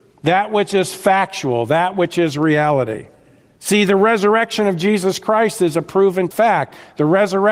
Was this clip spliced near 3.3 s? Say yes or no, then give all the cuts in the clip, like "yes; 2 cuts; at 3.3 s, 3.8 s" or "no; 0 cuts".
no; 0 cuts